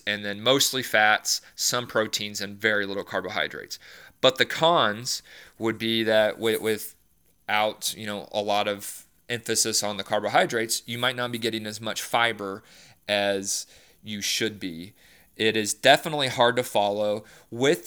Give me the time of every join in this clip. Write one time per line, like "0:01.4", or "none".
none